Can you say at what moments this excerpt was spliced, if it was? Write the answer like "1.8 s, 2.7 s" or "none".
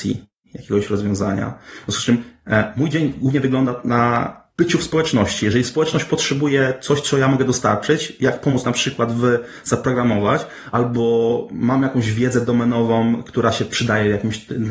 4.5 s

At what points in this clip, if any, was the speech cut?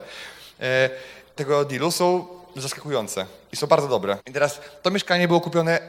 1.4 s, 4.2 s

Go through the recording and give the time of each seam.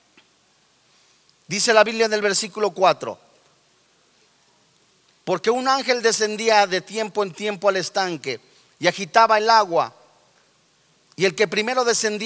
none

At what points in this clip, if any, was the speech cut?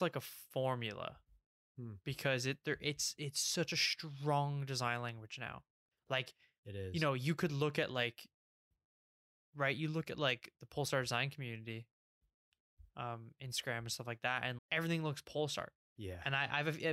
14.6 s, 15.8 s

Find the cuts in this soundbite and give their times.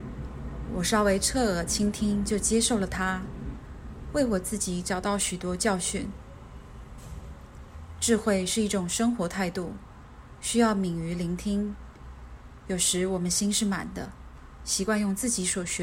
none

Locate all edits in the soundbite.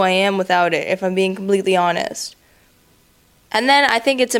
3.4 s

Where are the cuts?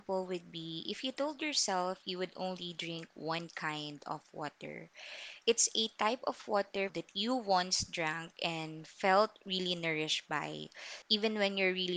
6.9 s, 11.0 s

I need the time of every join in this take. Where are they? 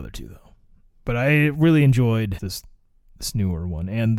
2.4 s

